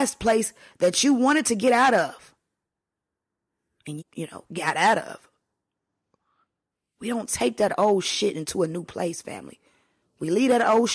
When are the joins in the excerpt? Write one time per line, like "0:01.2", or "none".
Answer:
0:04.0